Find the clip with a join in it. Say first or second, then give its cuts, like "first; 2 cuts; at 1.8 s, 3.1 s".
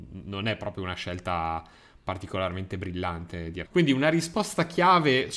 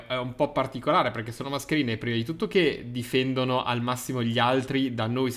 first; 1 cut; at 3.7 s